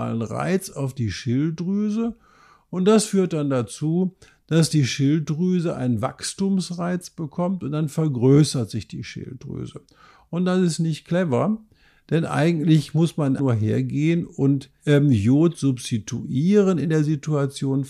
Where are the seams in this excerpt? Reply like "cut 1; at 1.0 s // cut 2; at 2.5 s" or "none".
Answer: cut 1; at 13.4 s